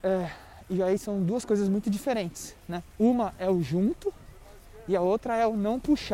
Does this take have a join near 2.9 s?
yes; 1 cut; at 2.9 s

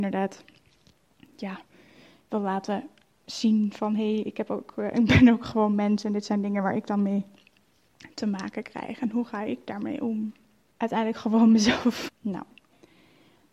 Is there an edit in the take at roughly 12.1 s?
yes; 2 cuts; at 10.7 s, 12.1 s

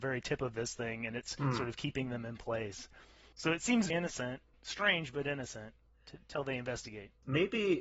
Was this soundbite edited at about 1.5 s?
no; 1 cut; at 3.9 s

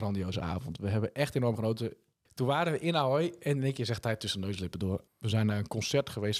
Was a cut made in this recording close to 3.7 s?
no; 2 cuts; at 2.3 s, 5.1 s

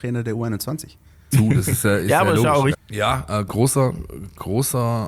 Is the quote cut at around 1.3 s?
yes; 2 cuts; at 1.3 s, 2.7 s

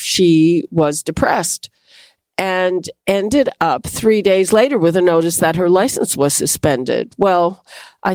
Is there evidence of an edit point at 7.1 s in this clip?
no; 0 cuts

